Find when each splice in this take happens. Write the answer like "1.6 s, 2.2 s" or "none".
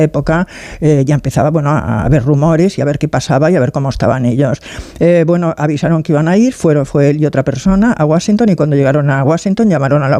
none